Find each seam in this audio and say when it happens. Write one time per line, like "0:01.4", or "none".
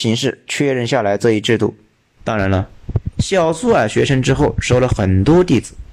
0:02.2